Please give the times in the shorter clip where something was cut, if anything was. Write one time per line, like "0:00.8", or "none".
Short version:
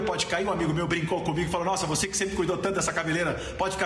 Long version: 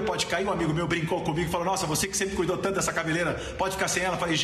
none